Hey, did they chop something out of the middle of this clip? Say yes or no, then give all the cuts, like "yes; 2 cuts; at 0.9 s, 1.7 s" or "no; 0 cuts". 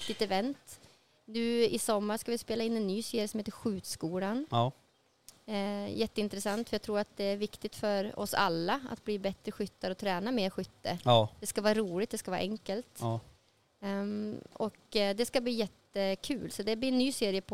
no; 0 cuts